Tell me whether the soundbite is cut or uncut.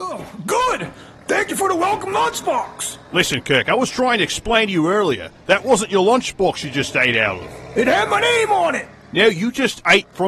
uncut